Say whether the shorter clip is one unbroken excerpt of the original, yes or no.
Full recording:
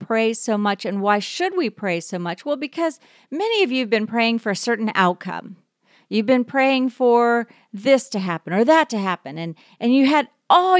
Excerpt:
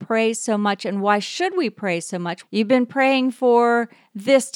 no